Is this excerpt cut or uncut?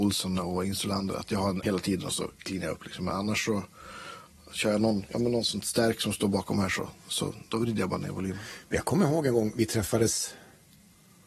cut